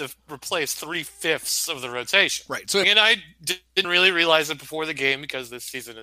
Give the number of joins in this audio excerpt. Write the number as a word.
two